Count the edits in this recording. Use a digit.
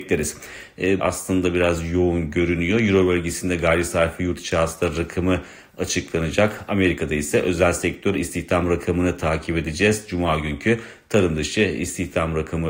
1